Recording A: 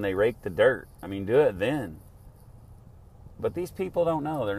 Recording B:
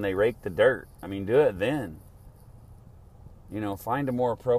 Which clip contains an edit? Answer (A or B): A